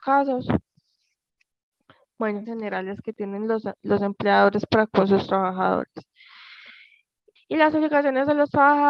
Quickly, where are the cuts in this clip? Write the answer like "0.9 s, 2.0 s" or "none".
2.4 s, 7.4 s